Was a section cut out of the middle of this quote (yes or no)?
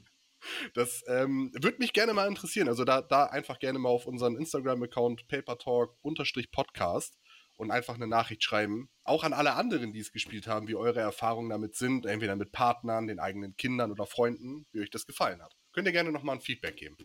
yes